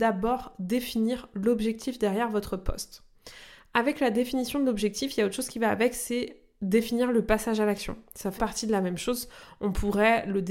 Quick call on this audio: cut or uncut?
cut